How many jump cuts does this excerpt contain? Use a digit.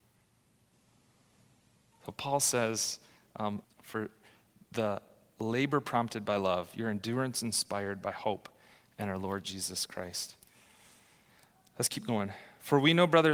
2